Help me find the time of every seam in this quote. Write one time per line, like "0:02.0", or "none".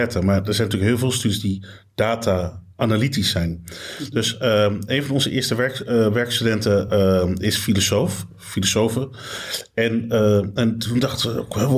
none